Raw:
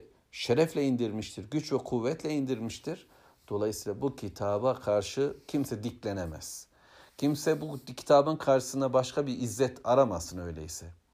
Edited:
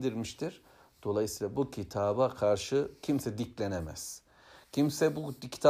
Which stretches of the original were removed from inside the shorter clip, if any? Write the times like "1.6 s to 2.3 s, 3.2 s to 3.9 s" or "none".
none